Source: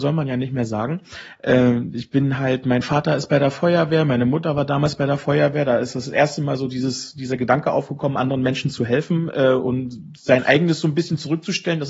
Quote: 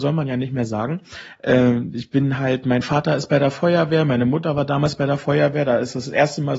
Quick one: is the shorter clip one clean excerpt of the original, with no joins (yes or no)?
yes